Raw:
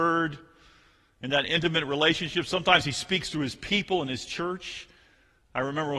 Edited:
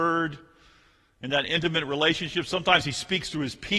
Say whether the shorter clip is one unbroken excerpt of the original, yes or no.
yes